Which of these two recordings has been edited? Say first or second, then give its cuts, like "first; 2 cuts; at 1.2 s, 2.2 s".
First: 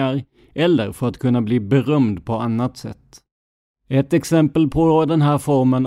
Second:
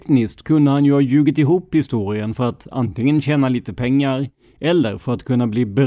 first; 1 cut; at 3.7 s